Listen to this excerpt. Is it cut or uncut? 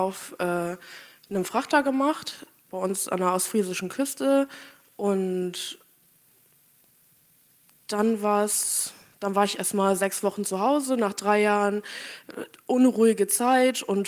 uncut